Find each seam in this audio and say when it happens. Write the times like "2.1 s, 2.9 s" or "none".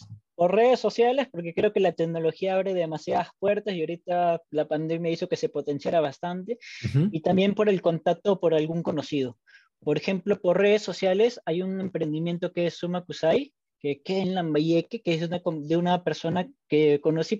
4.4 s